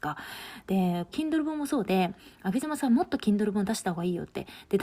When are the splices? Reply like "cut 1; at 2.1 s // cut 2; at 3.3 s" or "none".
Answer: cut 1; at 1.1 s